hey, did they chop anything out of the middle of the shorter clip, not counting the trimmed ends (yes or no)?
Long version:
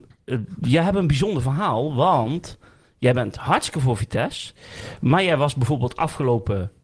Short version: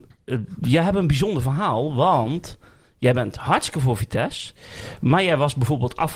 no